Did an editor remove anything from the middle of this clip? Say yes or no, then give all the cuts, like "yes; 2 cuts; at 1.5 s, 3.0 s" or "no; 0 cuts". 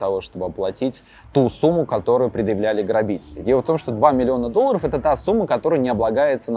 no; 0 cuts